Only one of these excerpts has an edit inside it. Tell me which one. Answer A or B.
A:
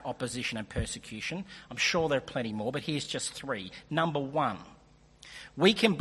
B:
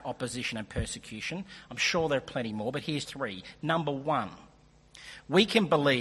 B